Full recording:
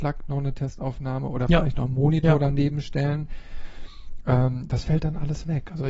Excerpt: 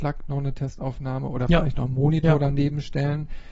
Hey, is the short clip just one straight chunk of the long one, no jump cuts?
yes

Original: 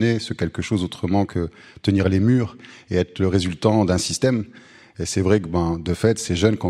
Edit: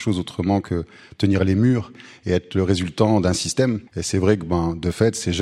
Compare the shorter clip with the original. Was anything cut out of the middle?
yes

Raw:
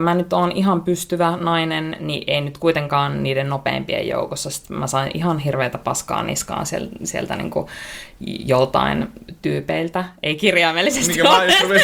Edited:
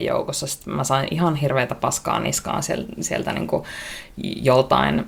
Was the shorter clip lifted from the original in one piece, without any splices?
yes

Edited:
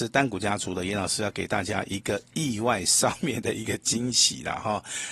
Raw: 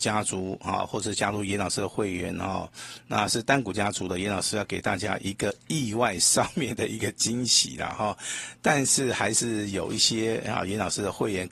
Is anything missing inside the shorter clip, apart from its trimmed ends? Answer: no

